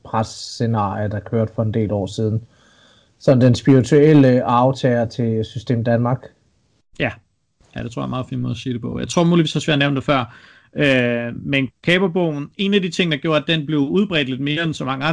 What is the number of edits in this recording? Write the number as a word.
zero